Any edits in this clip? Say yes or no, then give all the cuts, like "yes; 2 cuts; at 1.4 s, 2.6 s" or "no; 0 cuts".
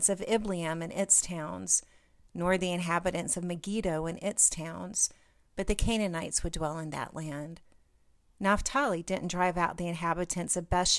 yes; 1 cut; at 8.2 s